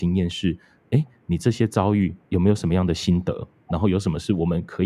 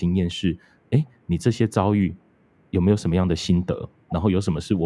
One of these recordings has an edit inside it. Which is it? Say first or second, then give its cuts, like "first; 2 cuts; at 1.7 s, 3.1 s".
first; 1 cut; at 2.2 s